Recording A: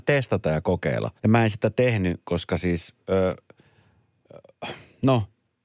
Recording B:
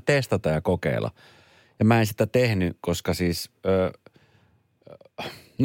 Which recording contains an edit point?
A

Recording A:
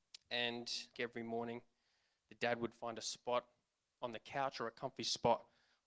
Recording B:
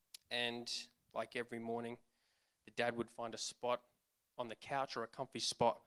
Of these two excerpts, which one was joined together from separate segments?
A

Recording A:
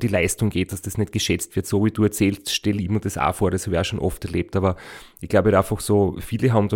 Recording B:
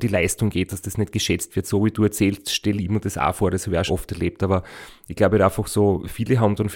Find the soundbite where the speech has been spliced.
B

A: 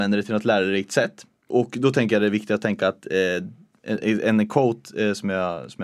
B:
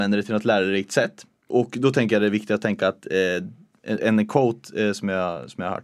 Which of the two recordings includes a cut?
B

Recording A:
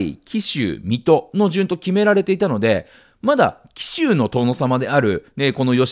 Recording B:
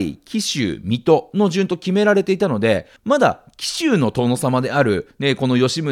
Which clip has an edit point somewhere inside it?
B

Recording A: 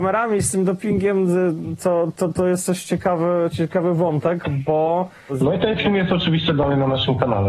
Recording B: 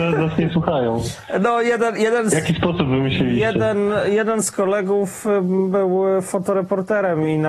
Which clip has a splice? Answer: A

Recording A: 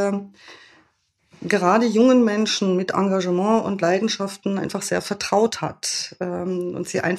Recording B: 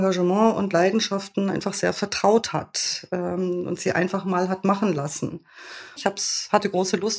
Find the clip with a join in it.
B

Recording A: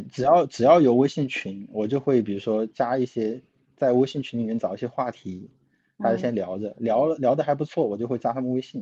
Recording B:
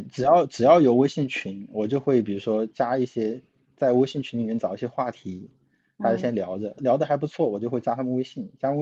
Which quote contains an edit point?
B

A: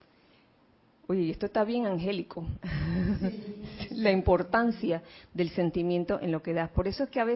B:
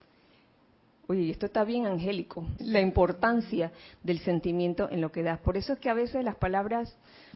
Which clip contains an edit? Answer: B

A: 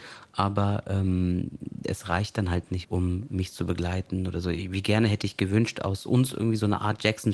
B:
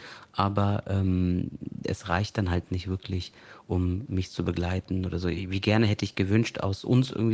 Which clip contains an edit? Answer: A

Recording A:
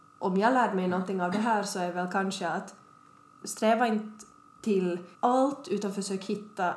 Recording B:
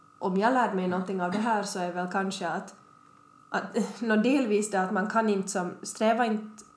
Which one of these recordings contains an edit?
A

